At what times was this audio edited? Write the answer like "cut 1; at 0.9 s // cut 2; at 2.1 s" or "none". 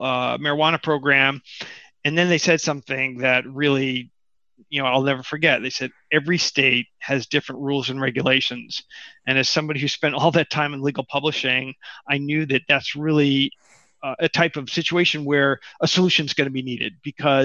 none